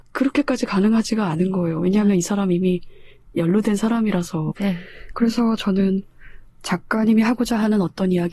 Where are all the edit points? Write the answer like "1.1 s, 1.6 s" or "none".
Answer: 4.5 s